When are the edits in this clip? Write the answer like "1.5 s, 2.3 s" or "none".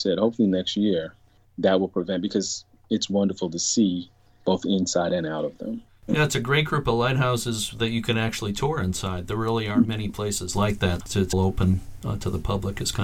11.3 s